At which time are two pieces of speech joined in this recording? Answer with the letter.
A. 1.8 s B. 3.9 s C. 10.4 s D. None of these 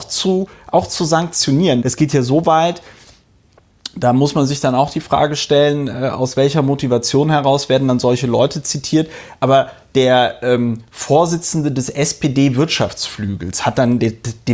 A